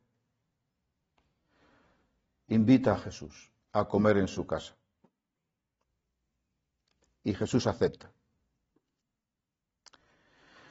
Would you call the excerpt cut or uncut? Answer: cut